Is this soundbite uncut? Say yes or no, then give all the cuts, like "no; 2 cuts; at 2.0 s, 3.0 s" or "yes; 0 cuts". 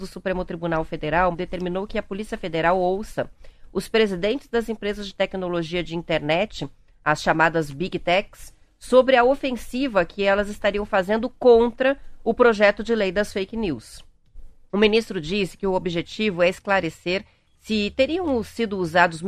no; 1 cut; at 1.3 s